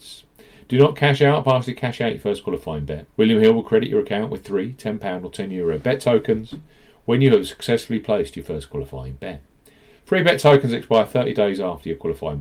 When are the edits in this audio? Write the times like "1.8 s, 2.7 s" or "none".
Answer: 3.1 s